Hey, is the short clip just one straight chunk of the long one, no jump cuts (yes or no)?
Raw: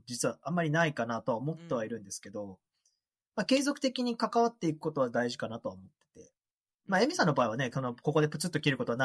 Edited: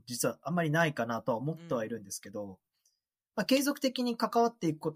yes